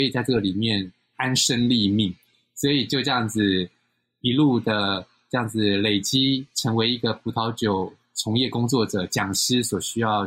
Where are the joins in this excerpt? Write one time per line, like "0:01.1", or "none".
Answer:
0:01.1